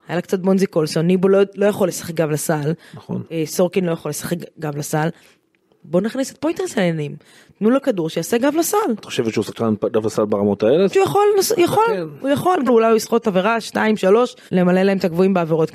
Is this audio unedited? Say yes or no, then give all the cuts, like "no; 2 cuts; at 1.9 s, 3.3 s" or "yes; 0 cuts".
no; 3 cuts; at 10.9 s, 12.7 s, 14.5 s